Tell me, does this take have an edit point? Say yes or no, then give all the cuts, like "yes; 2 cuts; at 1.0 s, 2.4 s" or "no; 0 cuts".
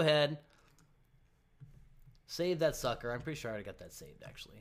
no; 0 cuts